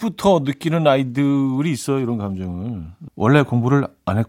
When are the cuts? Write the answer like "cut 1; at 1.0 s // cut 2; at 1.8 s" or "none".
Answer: cut 1; at 3.1 s